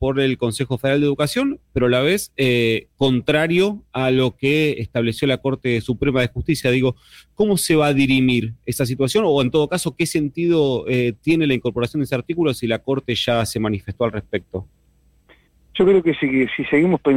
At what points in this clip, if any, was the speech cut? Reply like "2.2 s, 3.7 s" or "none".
none